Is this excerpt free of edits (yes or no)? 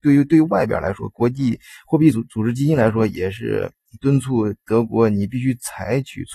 yes